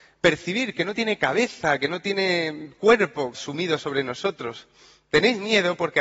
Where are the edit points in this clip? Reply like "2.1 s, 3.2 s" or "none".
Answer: 3.3 s